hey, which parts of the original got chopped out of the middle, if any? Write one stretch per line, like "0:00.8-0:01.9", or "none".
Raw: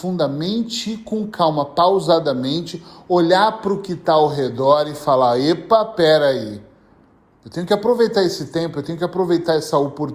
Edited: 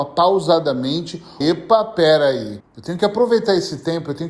0:03.0-0:05.4
0:06.6-0:07.3